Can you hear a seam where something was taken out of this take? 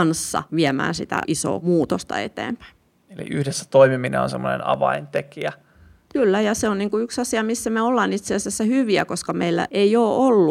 no; 0 cuts

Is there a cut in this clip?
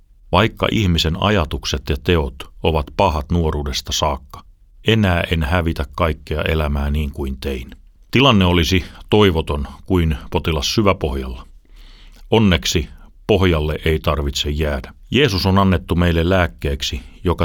yes; 2 cuts; at 7.9 s, 15.0 s

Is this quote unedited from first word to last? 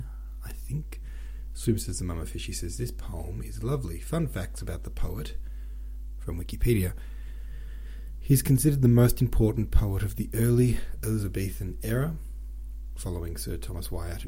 yes; 0 cuts

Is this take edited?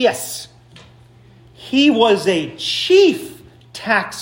no; 0 cuts

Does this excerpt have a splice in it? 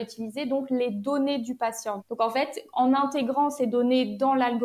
yes; 1 cut; at 2.0 s

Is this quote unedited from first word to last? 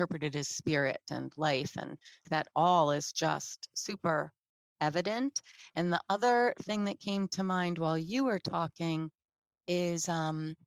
no; 1 cut; at 2.2 s

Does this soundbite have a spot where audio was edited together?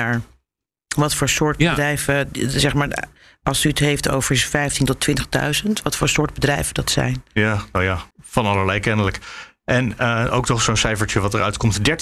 yes; 1 cut; at 8.1 s

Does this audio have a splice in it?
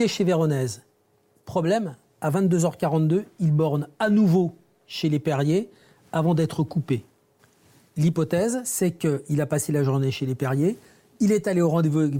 no; 0 cuts

